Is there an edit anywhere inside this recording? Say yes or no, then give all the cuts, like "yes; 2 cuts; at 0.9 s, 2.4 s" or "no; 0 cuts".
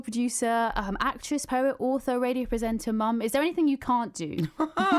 no; 0 cuts